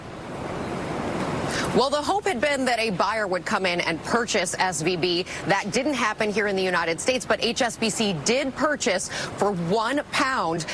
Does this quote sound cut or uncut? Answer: uncut